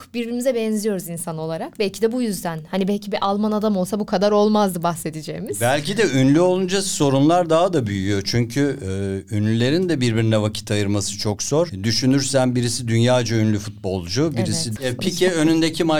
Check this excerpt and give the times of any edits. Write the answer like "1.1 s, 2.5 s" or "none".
11.7 s, 14.8 s